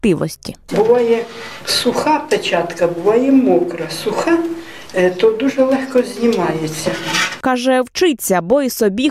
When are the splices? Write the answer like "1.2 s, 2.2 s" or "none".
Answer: 7.4 s